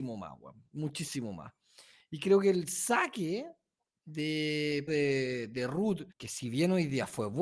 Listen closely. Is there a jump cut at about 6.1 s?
yes; 2 cuts; at 4.9 s, 6.1 s

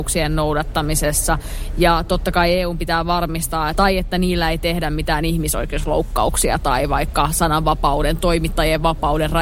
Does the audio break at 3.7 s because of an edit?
yes; 1 cut; at 3.7 s

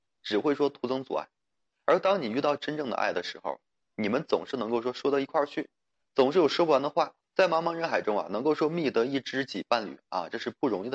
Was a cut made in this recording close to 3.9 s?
no; 1 cut; at 7.2 s

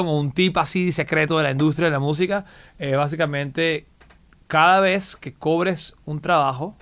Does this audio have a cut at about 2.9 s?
no; 0 cuts

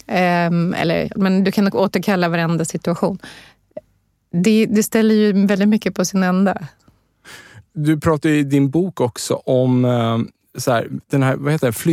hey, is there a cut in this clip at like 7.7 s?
no; 1 cut; at 1.2 s

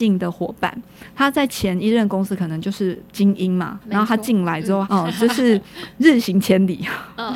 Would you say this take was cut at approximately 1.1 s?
no; 2 cuts; at 3.8 s, 4.8 s

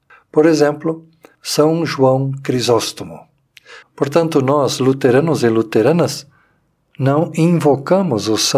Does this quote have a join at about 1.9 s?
no; 1 cut; at 3.8 s

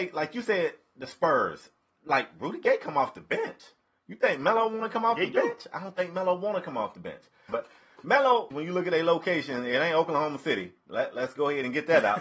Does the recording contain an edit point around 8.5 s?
yes; 2 cuts; at 7.5 s, 8.5 s

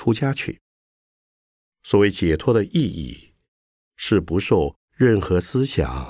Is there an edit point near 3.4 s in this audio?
no; 1 cut; at 1.6 s

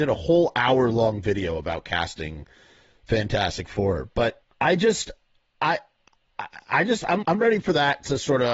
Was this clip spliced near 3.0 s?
no; 2 cuts; at 4.5 s, 7.2 s

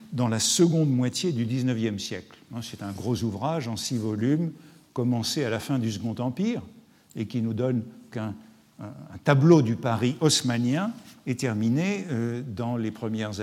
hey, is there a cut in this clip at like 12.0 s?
no; 1 cut; at 8.1 s

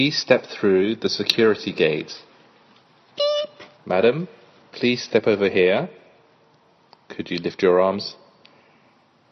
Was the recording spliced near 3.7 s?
yes; 1 cut; at 3.7 s

